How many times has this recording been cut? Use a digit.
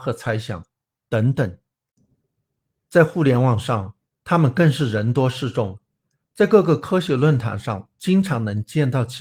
0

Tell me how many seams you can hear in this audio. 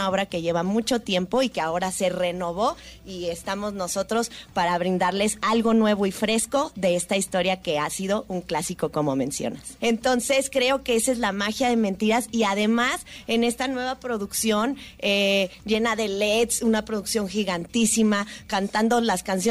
1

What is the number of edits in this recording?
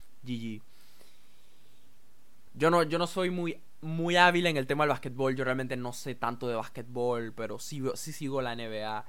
1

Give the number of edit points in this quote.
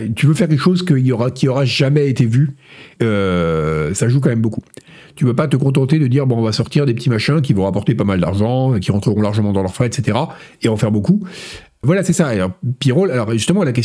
2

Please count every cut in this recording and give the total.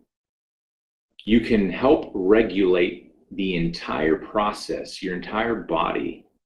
0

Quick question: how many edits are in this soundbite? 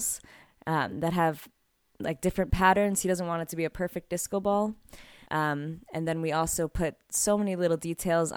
1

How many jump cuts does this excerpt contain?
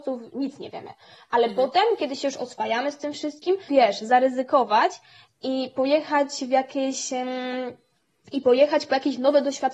1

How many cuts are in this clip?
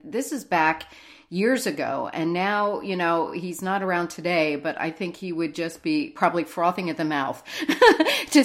0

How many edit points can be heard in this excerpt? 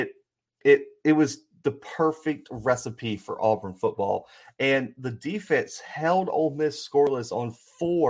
0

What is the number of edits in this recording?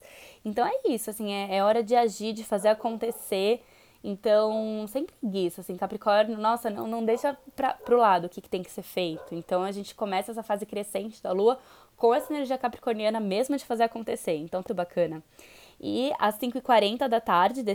1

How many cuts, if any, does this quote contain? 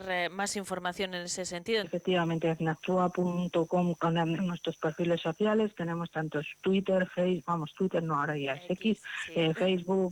2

